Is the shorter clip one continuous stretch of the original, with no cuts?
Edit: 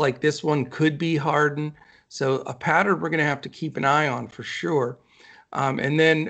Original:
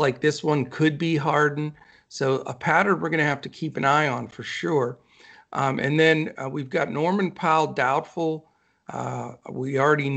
yes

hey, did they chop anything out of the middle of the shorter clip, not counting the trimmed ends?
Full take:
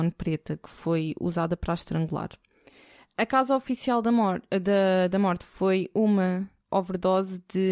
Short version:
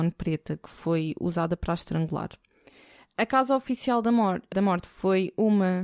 yes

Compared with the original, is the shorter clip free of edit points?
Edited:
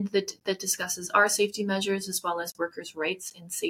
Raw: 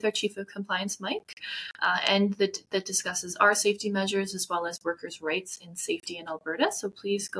yes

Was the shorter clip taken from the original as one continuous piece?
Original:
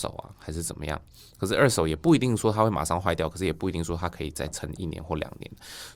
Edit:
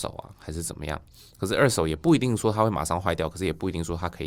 yes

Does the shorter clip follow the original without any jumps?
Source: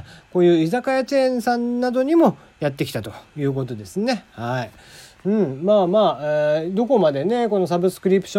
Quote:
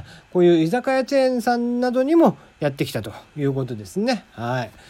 yes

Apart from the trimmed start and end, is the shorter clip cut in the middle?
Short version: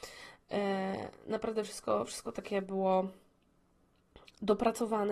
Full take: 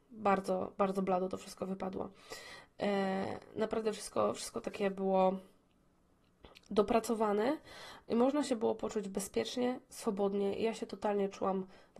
no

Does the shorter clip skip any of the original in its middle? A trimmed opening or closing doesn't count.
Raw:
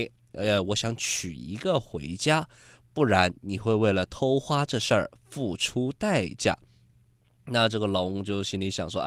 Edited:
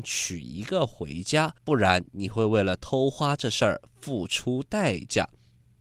yes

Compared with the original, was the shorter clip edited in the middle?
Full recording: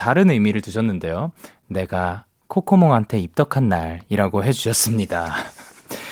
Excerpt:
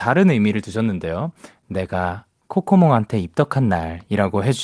no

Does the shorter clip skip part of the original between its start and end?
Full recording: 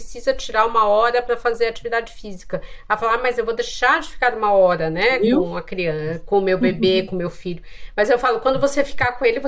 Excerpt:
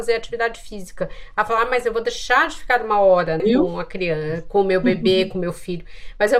yes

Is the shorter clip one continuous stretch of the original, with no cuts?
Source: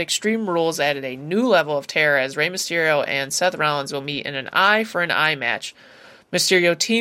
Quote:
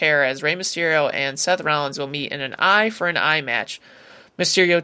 yes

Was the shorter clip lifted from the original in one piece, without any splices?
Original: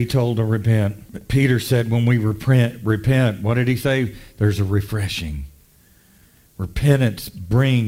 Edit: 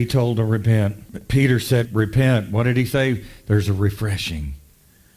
no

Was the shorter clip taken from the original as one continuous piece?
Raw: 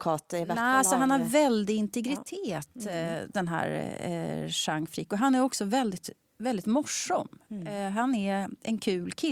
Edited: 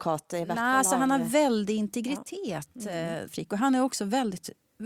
no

